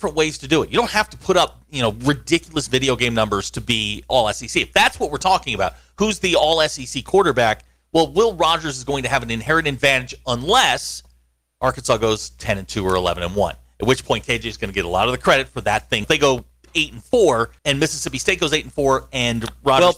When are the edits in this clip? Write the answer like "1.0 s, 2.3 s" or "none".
16.0 s, 17.6 s